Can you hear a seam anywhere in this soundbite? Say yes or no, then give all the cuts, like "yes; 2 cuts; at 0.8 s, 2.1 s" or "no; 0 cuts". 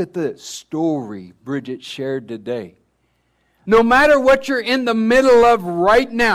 yes; 1 cut; at 3.6 s